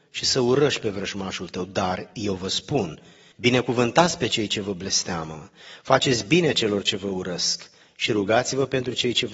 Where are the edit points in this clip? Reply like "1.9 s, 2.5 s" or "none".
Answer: 3.3 s

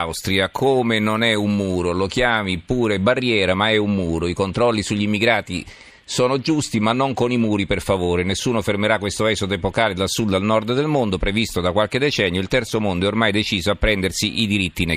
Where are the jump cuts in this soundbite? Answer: none

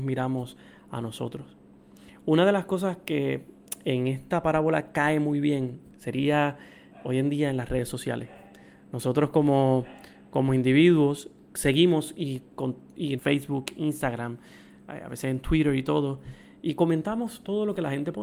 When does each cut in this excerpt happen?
11.4 s, 13.2 s

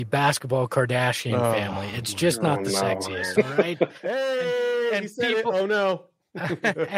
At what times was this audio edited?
none

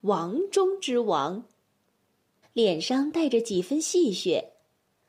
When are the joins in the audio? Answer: 2.4 s

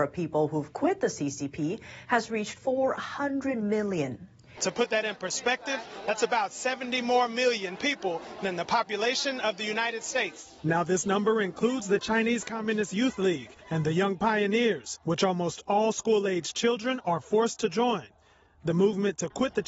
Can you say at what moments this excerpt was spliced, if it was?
4.6 s, 10.6 s

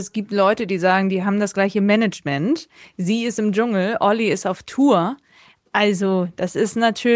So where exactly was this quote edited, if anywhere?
none

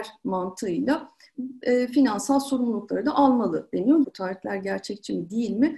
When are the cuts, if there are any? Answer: 4.0 s

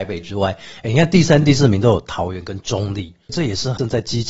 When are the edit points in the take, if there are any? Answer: none

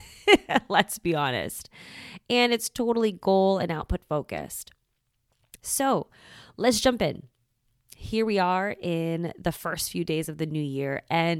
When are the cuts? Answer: 5.6 s

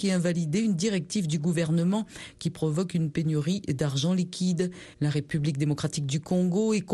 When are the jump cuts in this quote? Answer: 4.9 s

